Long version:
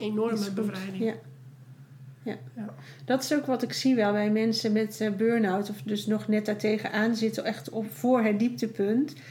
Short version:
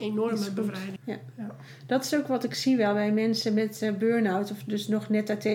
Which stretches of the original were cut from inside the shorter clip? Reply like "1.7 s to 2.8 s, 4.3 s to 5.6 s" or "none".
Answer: 1.0 s to 2.1 s